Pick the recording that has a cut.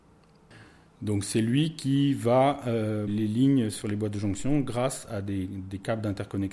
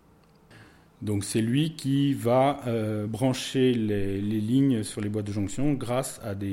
first; 1 cut; at 3.1 s

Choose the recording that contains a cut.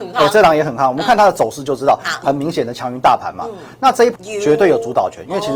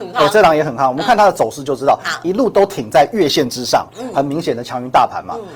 first; 2 cuts; at 2.2 s, 4.1 s

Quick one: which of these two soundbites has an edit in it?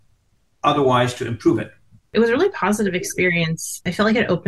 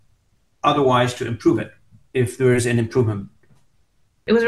first; 1 cut; at 2.0 s

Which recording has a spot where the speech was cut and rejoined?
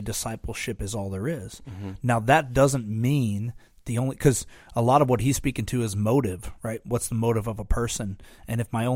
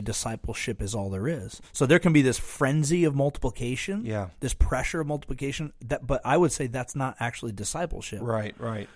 second; 1 cut; at 1.6 s

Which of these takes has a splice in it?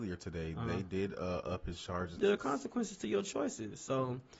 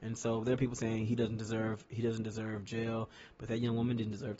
first; 1 cut; at 2.2 s

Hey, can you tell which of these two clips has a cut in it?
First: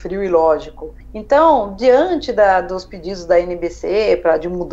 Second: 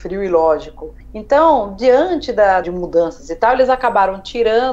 second; 1 cut; at 2.6 s

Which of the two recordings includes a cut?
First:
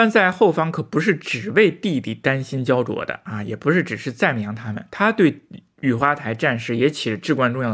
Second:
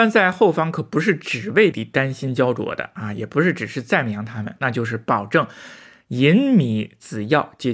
second; 2 cuts; at 1.7 s, 4.6 s

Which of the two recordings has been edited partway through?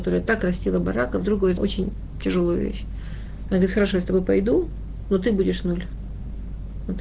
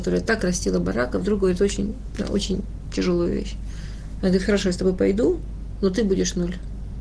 first; 1 cut; at 1.6 s

